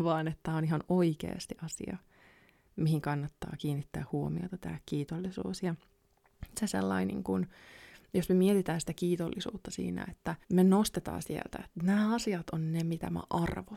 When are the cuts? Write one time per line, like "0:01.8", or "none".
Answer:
0:06.5
0:10.4